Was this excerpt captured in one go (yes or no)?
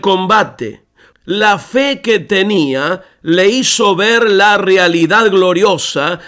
no